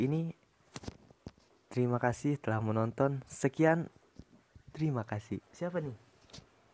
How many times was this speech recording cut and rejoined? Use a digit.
1